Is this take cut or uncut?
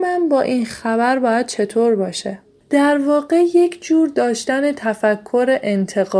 cut